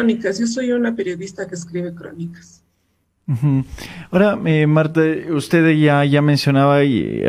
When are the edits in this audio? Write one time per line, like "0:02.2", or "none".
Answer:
none